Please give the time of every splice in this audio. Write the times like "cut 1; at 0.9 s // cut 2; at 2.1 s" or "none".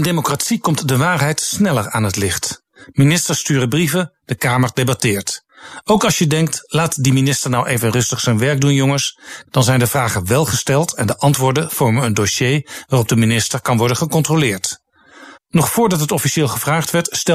cut 1; at 9.5 s // cut 2; at 15.4 s